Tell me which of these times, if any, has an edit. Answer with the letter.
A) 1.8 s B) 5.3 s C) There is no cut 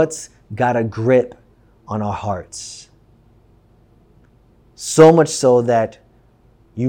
C